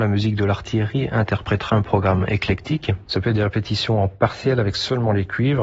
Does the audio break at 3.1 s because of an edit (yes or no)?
yes